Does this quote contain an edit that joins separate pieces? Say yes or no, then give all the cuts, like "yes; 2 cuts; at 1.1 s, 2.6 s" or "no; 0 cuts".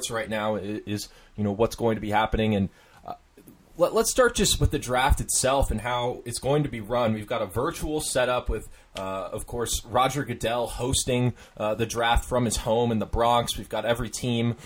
no; 0 cuts